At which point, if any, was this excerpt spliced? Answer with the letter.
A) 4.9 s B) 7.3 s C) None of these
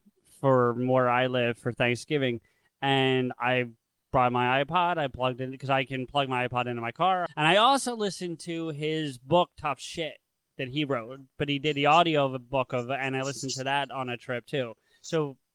B